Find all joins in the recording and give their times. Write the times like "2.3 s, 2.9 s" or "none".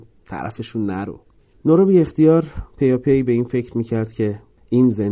none